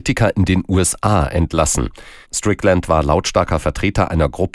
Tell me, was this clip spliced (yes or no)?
yes